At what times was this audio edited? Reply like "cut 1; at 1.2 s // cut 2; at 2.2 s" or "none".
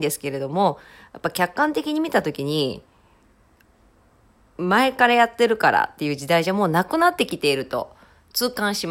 none